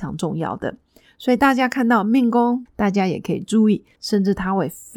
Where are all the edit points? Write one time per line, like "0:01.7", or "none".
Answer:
0:02.7
0:04.0